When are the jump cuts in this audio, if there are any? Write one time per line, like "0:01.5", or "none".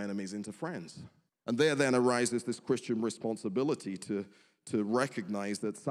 0:01.3

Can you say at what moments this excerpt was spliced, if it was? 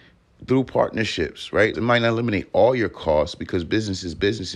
0:01.7

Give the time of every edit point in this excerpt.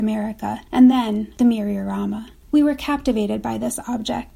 none

